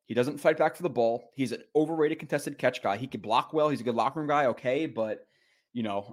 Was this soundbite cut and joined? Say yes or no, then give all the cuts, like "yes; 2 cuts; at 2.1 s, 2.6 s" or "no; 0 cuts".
no; 0 cuts